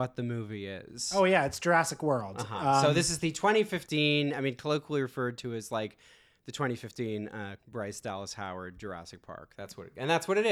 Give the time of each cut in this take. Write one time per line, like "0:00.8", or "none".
0:07.6